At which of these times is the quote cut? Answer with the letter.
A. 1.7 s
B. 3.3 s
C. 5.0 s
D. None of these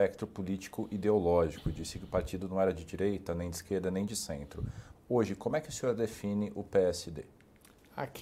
C